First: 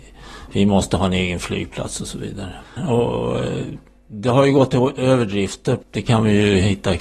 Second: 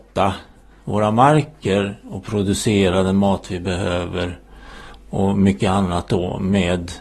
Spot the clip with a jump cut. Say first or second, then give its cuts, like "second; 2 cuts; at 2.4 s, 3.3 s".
first; 1 cut; at 2.8 s